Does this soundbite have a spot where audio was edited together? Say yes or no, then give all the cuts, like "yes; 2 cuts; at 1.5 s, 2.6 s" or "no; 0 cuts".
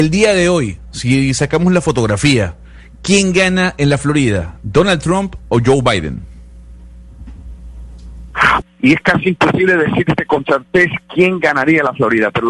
yes; 1 cut; at 8.6 s